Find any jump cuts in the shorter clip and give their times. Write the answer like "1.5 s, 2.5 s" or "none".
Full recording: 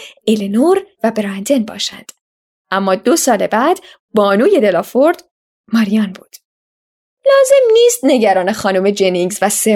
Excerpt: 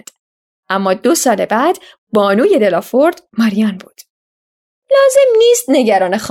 3.3 s